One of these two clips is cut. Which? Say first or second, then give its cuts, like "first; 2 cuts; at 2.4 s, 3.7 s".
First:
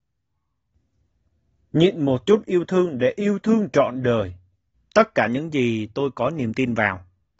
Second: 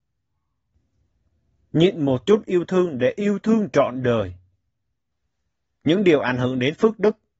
first; 1 cut; at 4.7 s